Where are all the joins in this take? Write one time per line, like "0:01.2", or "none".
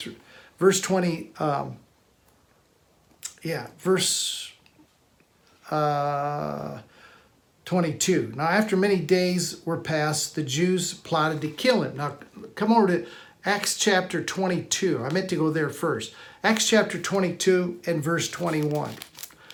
none